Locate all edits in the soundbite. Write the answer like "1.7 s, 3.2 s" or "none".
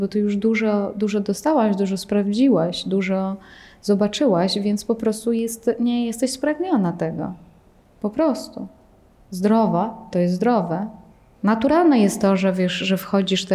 11.4 s